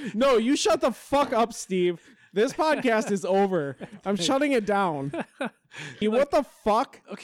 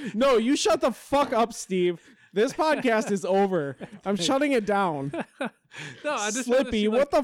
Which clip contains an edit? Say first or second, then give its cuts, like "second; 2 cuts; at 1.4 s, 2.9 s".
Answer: first; 1 cut; at 6.0 s